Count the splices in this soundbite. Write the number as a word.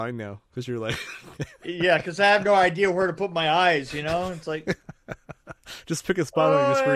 zero